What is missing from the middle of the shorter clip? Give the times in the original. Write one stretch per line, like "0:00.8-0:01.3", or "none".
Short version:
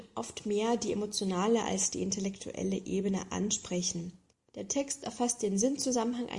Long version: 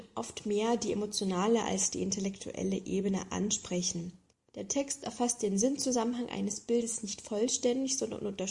none